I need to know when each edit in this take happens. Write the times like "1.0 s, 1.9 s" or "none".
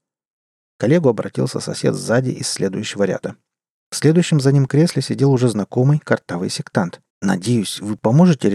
7.1 s